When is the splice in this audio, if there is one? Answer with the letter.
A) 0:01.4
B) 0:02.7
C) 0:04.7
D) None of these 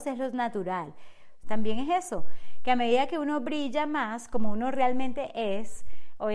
A